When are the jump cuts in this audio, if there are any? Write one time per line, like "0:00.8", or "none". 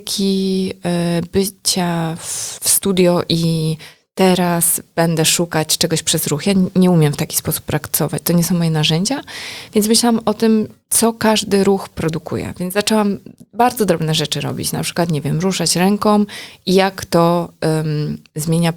none